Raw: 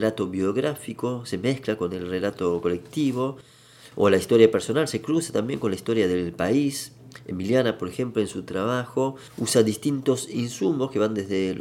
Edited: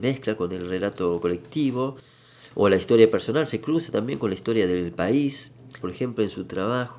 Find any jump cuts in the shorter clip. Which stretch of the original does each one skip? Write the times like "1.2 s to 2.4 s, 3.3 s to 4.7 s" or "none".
7.2 s to 7.8 s